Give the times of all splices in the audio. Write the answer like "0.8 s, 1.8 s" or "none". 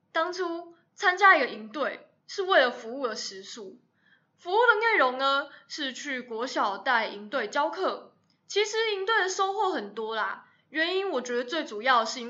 2.2 s

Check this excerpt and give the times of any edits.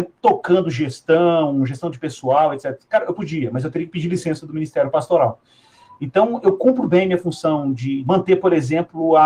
6.8 s, 8.0 s

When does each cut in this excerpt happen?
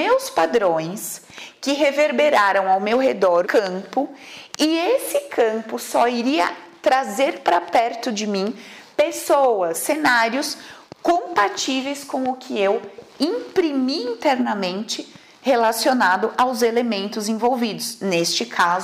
3.4 s, 9.7 s

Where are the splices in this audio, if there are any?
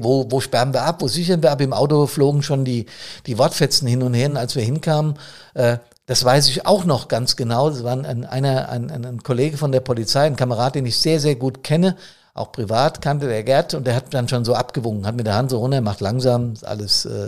none

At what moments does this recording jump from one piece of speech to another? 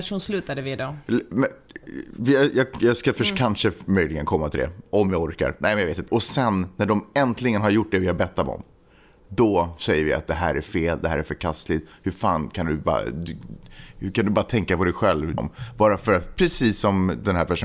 6.1 s, 15.4 s

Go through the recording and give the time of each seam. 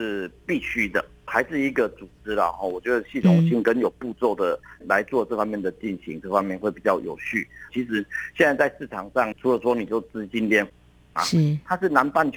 7.7 s, 9.3 s, 11.2 s

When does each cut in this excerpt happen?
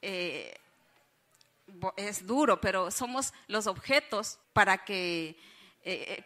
4.4 s

